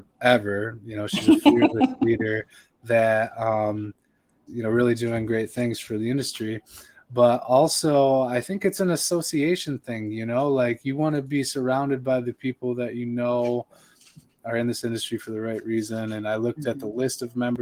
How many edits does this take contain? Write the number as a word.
one